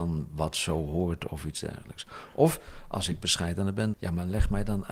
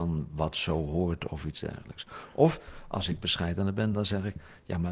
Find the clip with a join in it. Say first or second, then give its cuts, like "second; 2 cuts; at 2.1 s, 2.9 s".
first; 1 cut; at 3.9 s